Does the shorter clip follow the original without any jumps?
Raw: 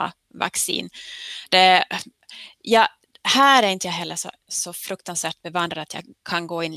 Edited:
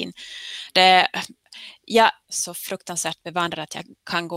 no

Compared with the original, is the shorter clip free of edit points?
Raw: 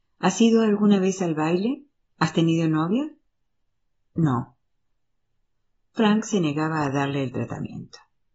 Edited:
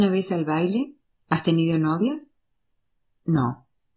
yes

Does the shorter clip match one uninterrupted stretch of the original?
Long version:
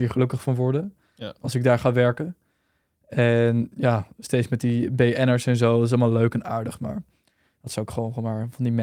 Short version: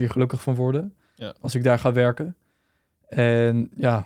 yes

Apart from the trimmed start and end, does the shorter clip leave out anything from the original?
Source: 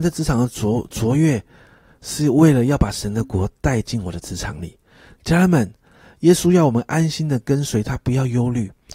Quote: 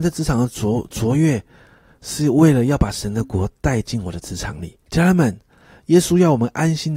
yes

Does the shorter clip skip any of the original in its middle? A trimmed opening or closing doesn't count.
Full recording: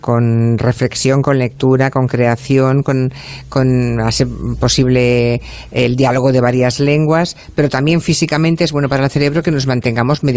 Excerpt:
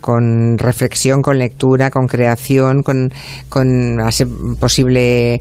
no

